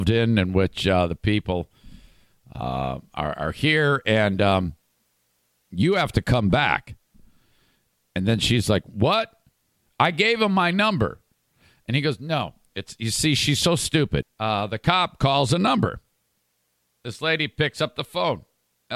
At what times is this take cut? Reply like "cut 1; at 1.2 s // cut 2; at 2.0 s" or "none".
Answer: cut 1; at 14.2 s